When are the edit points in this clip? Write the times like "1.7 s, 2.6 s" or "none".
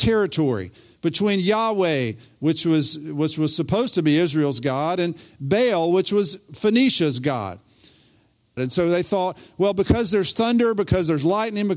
8.6 s